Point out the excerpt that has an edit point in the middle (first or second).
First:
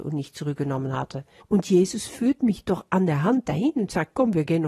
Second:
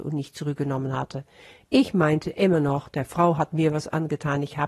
first